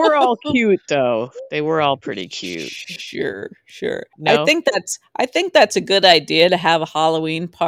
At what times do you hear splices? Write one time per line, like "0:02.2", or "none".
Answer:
0:04.1